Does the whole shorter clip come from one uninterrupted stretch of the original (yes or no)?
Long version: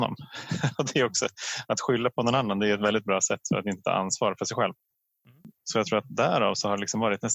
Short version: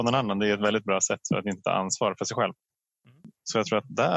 yes